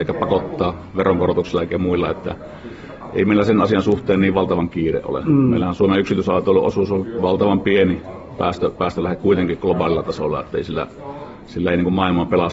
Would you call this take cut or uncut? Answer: uncut